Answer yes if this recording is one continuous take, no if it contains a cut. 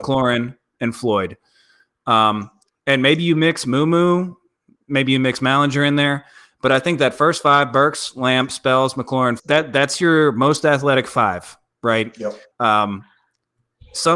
no